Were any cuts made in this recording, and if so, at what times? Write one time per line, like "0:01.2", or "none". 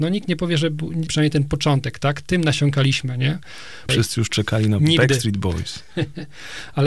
0:01.1
0:03.9